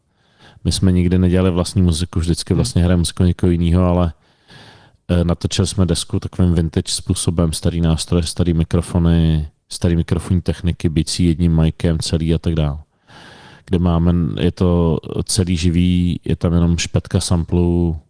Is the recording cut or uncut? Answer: uncut